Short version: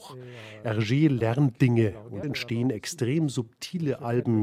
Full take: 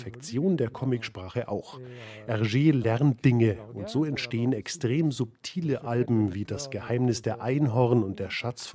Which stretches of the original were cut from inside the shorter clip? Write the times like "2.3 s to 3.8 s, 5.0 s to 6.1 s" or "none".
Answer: 3.9 s to 4.1 s